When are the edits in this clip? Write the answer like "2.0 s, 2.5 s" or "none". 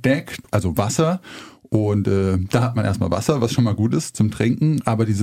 none